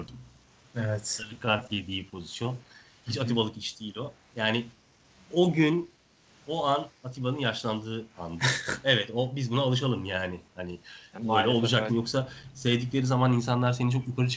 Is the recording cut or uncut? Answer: cut